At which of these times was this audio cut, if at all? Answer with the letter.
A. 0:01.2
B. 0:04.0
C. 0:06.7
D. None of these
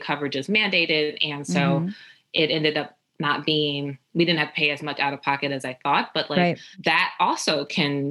C